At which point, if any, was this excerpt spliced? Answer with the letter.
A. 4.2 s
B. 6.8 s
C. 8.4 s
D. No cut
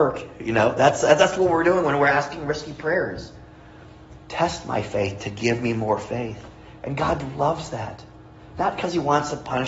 A